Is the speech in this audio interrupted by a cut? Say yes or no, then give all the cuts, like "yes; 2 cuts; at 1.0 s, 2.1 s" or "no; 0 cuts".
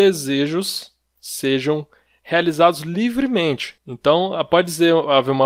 yes; 1 cut; at 3.8 s